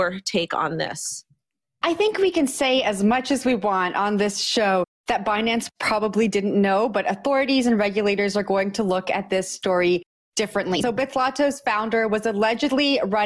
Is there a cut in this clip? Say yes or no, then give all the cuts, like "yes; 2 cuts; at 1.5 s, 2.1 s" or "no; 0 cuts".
no; 0 cuts